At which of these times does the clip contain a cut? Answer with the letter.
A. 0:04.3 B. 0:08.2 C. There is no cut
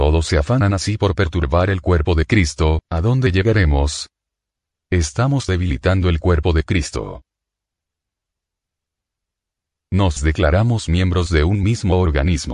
C